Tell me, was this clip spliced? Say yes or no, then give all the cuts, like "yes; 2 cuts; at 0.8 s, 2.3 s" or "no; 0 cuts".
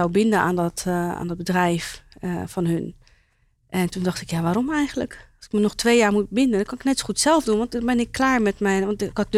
no; 0 cuts